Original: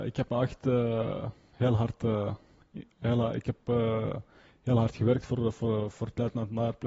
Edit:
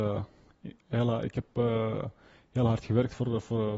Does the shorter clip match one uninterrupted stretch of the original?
yes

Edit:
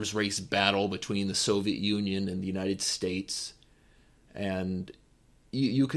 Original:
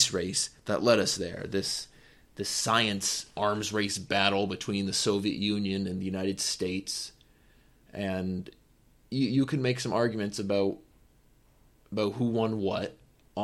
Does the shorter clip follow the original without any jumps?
yes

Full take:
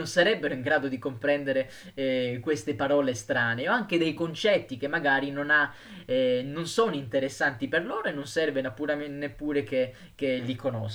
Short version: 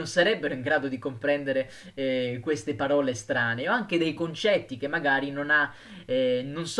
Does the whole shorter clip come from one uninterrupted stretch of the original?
yes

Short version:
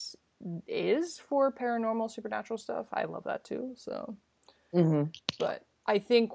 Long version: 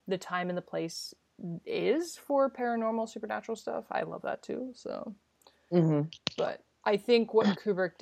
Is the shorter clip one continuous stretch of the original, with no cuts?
yes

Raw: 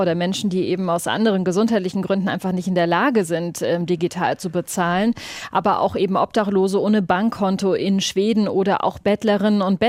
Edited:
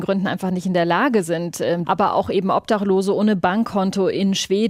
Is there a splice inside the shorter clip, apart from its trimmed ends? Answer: yes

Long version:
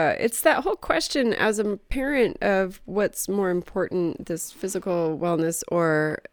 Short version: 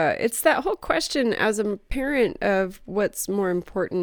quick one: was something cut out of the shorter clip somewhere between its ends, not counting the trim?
no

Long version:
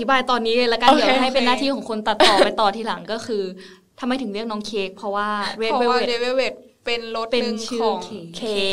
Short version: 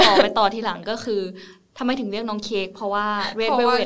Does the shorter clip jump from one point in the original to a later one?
no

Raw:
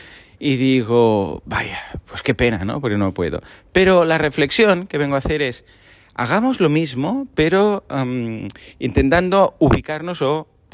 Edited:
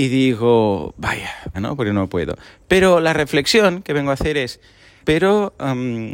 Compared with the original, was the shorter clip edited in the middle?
yes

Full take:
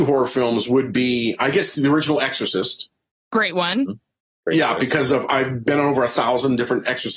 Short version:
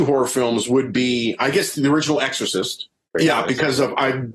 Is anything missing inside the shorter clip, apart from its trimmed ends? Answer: yes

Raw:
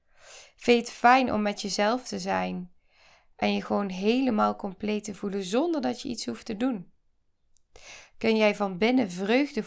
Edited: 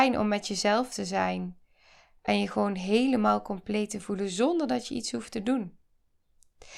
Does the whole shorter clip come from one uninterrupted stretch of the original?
yes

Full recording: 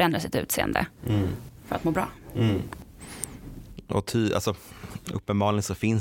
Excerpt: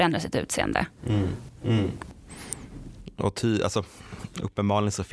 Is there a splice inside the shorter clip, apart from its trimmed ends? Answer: yes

